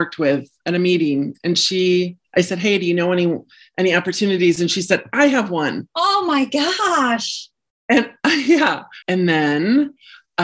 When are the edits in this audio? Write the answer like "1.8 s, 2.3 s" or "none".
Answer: 9.0 s